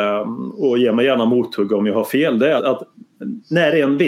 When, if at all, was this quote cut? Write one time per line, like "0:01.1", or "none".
0:02.6